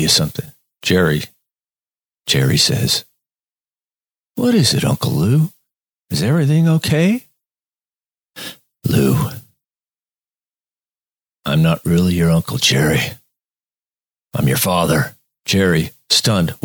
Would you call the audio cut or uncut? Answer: uncut